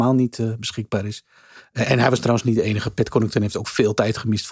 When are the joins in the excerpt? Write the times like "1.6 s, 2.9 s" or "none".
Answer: none